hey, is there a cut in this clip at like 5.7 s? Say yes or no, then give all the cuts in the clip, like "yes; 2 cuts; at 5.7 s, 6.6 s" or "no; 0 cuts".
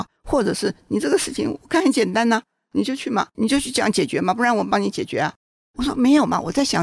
yes; 2 cuts; at 3.3 s, 5.7 s